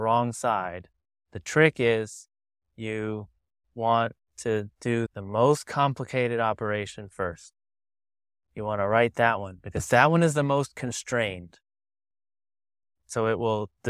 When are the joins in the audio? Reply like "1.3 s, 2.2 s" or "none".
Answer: none